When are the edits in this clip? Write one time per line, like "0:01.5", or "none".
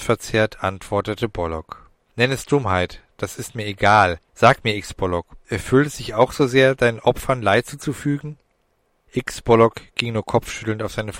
0:04.2